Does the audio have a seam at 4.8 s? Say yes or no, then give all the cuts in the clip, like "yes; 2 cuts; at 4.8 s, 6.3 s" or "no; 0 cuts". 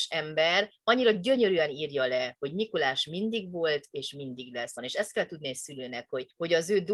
yes; 1 cut; at 4.8 s